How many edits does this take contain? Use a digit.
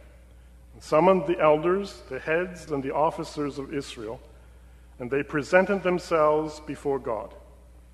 1